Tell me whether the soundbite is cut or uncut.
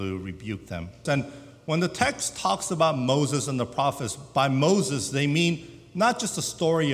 cut